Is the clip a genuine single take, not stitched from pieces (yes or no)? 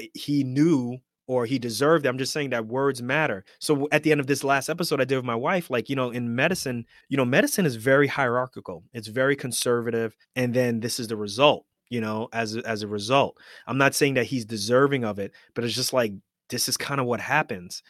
no